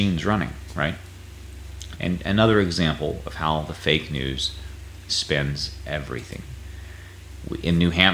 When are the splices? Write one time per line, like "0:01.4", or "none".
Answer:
0:02.0